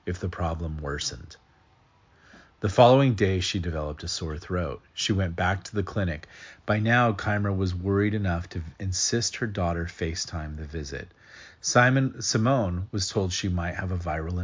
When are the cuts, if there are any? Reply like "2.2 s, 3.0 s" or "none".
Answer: none

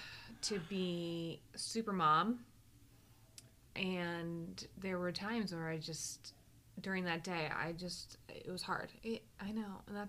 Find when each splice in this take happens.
9.0 s

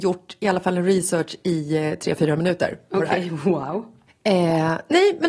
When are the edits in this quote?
4.1 s

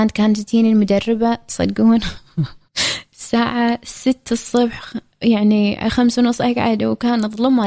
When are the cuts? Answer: none

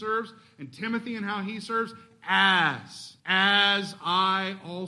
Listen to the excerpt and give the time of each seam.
3.2 s

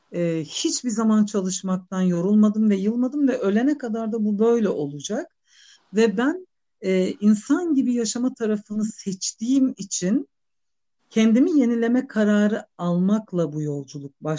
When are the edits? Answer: none

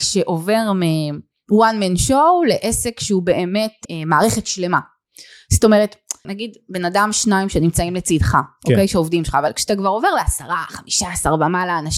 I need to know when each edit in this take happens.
3.8 s, 6.2 s

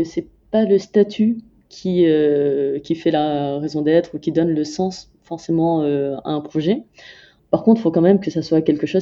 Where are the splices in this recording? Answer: 7.4 s

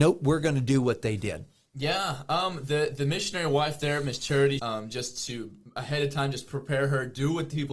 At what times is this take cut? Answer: 4.6 s

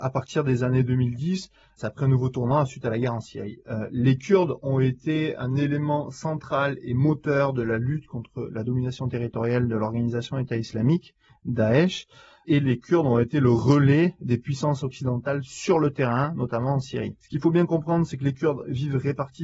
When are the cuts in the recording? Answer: none

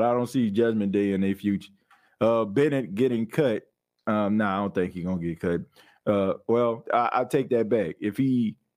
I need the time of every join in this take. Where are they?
6.8 s

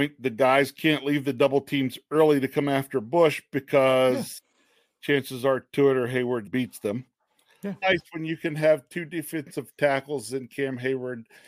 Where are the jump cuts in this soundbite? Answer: 6.5 s, 7.8 s

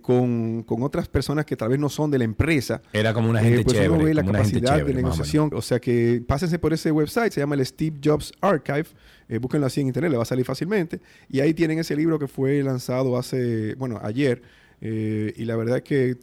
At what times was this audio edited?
5.5 s

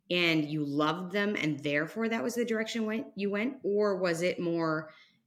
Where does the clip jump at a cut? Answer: none

